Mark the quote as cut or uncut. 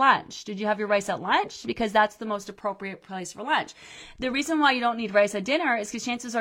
uncut